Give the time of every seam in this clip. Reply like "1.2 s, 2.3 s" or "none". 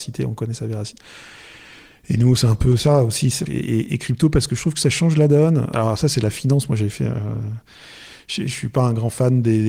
3.5 s